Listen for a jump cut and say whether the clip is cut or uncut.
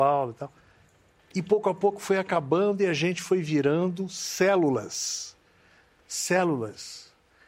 uncut